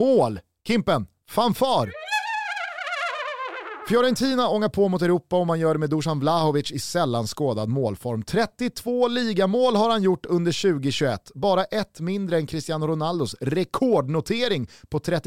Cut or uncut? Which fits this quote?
uncut